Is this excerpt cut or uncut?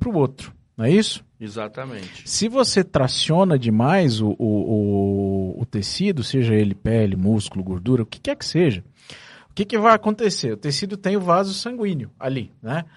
uncut